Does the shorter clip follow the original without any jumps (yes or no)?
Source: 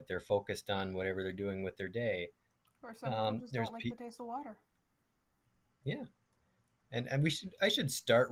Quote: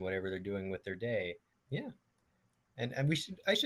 no